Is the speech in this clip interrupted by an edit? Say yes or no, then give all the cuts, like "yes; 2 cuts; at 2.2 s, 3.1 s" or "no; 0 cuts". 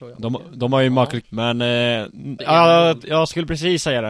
yes; 2 cuts; at 1.2 s, 2.4 s